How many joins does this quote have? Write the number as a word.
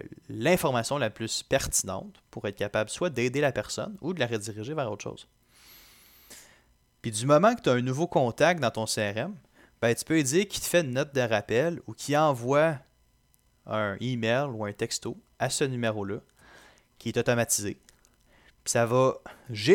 one